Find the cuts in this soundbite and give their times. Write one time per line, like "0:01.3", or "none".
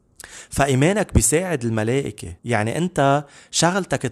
0:02.4